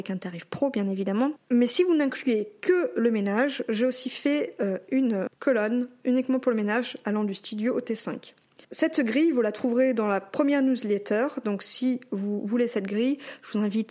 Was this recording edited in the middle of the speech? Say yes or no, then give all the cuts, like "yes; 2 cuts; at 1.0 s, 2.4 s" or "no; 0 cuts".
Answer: no; 0 cuts